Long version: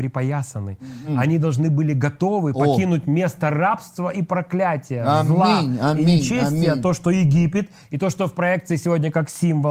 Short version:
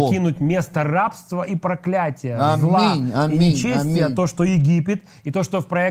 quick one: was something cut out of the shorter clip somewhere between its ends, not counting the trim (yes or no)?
no